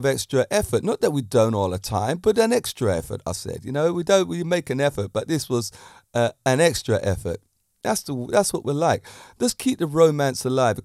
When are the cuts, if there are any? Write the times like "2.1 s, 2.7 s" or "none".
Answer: none